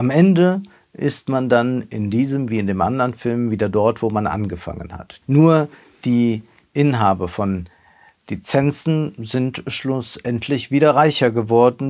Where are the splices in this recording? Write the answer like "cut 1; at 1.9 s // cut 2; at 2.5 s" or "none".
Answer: cut 1; at 5.2 s